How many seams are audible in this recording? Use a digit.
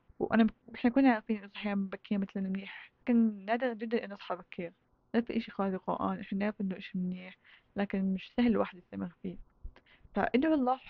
1